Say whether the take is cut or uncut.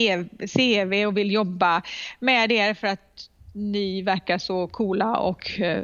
uncut